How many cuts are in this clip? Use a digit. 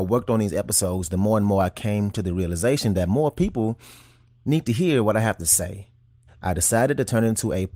1